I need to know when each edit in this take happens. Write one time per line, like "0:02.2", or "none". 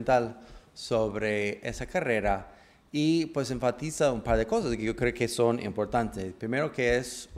none